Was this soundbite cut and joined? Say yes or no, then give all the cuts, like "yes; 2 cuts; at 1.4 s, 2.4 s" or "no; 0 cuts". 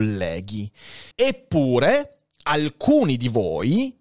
yes; 1 cut; at 1.1 s